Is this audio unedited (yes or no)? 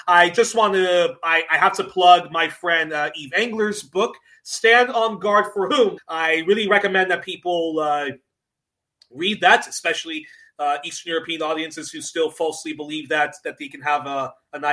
no